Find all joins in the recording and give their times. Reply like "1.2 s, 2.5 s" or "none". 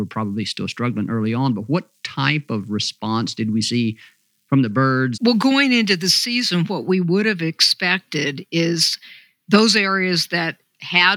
5.1 s